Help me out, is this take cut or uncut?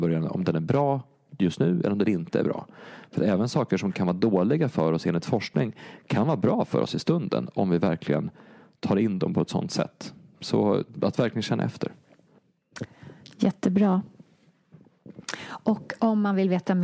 uncut